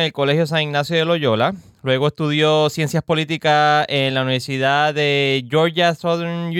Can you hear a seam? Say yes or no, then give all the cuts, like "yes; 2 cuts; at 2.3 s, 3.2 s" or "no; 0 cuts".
no; 0 cuts